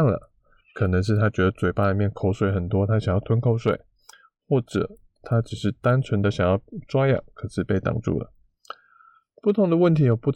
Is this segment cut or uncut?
uncut